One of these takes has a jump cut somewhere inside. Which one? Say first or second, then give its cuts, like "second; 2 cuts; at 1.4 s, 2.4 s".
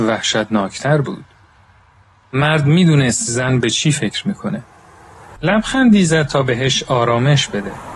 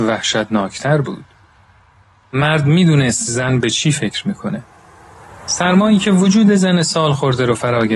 first; 1 cut; at 5.4 s